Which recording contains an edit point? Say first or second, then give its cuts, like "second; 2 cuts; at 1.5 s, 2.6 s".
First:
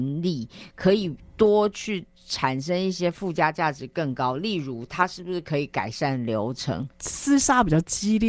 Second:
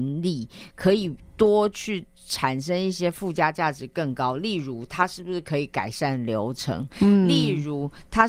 first; 1 cut; at 6.9 s